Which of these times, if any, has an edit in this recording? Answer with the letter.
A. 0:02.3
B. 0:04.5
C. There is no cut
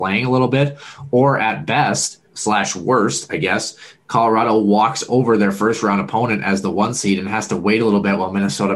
A